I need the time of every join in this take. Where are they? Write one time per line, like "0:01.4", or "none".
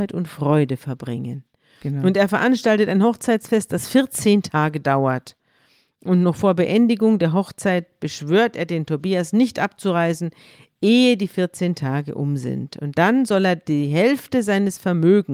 none